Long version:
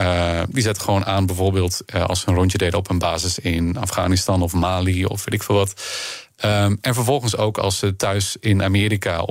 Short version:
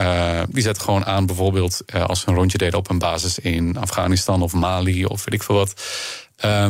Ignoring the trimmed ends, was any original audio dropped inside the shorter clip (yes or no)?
no